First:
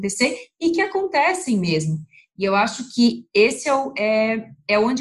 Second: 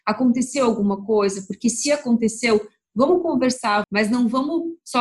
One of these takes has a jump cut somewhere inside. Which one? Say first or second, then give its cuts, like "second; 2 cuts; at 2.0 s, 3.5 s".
second; 1 cut; at 3.8 s